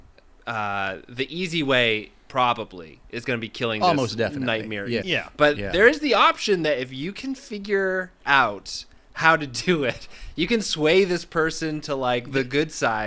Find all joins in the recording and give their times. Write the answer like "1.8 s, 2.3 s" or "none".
5.0 s